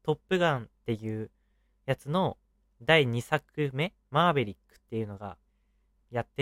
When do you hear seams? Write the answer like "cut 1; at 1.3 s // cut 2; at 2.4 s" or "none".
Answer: none